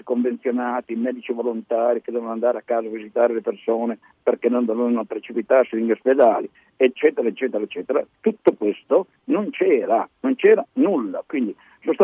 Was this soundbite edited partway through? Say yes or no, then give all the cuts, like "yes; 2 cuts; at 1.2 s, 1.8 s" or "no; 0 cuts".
yes; 1 cut; at 10.1 s